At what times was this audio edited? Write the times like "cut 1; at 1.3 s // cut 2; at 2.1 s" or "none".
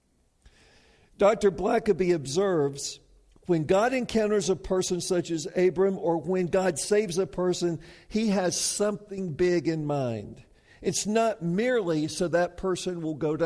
none